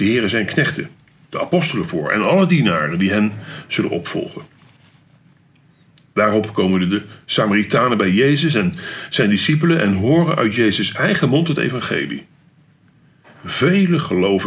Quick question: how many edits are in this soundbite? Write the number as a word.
zero